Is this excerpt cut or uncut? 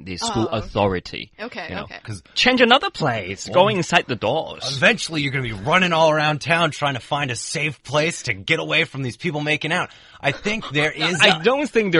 cut